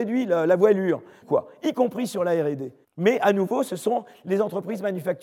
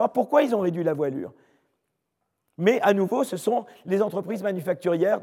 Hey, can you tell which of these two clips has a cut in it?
first; 2 cuts; at 1.2 s, 2.8 s

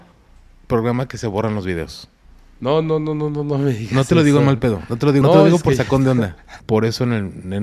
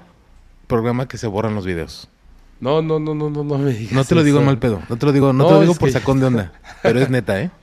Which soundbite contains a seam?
first; 2 cuts; at 5.2 s, 6.6 s

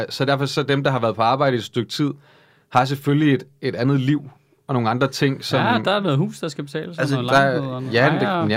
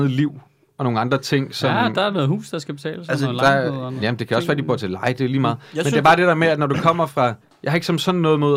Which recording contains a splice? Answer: second; 1 cut; at 4.0 s

